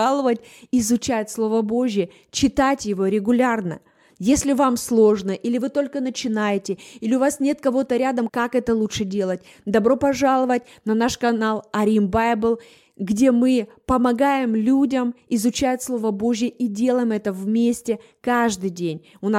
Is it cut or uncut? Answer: cut